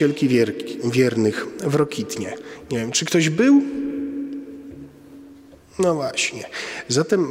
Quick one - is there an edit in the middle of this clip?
no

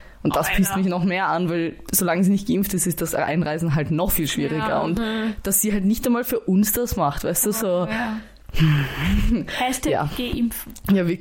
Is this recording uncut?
yes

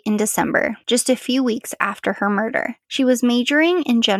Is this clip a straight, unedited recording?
yes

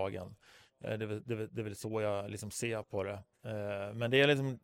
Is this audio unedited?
yes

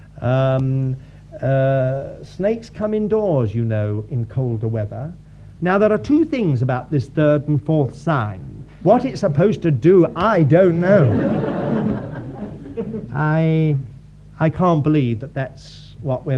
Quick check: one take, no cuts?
no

